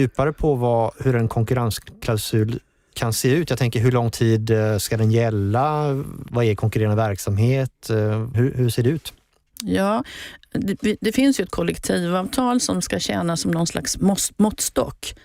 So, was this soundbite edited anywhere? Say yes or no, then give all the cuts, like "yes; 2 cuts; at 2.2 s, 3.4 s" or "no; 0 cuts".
yes; 1 cut; at 8.3 s